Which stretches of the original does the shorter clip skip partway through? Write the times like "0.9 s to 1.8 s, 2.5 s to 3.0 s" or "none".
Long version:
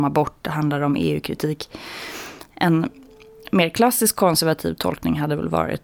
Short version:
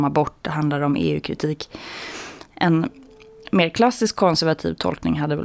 none